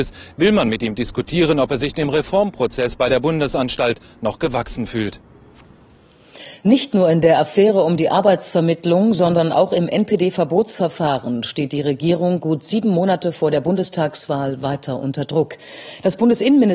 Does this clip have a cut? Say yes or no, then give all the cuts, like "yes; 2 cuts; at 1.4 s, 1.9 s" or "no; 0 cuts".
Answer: no; 0 cuts